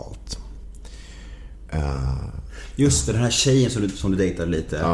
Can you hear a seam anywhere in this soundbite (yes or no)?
no